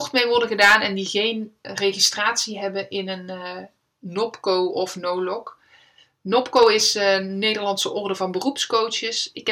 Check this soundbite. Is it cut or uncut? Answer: uncut